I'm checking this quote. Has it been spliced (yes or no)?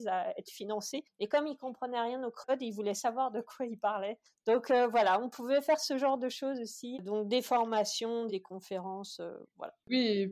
yes